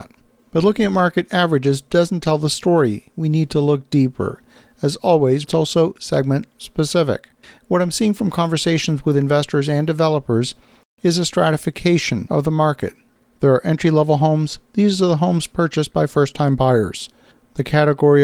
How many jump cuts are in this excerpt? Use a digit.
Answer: 1